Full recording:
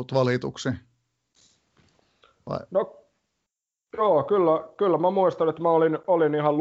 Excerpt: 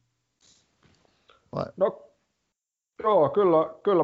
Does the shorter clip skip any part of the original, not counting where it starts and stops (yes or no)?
no